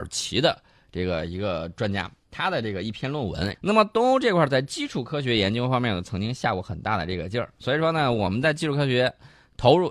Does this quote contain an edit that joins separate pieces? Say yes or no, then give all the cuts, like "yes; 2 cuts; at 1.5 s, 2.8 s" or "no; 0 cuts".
yes; 1 cut; at 3.5 s